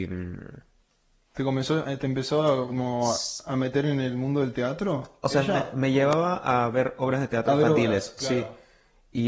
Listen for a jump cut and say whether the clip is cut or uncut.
uncut